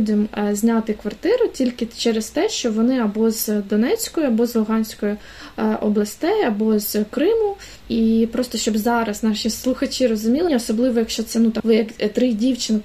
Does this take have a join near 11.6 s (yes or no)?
yes